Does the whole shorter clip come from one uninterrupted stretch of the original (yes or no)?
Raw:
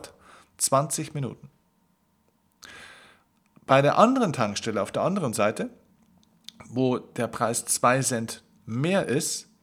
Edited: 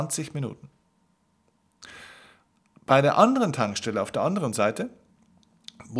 yes